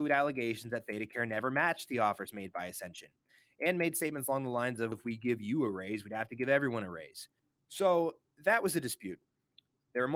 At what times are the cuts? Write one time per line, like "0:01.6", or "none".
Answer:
0:04.9